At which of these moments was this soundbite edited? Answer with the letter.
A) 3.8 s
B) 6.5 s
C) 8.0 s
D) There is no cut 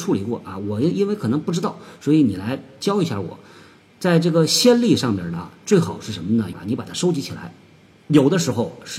B